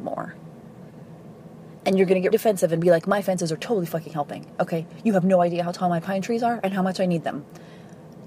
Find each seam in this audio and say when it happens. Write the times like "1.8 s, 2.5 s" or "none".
2.3 s